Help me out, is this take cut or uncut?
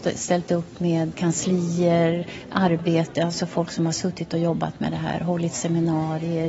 cut